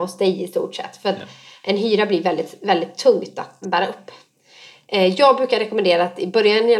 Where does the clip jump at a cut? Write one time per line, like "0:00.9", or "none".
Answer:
0:03.6